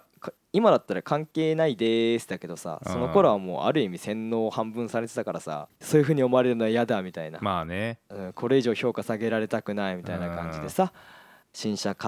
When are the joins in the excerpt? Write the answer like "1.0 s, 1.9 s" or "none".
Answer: 5.7 s